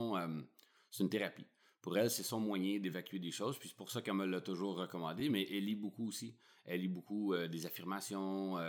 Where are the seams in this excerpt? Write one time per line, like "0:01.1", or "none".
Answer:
none